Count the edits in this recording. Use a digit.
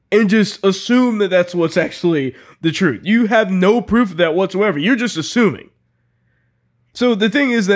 0